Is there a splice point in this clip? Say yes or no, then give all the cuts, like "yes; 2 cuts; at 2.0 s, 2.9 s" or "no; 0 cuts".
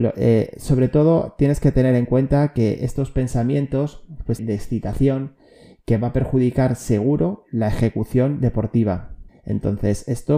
yes; 2 cuts; at 4.4 s, 9.3 s